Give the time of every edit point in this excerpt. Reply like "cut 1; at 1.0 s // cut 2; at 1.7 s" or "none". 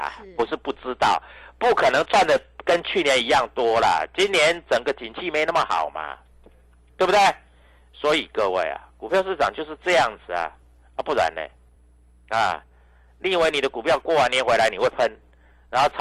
none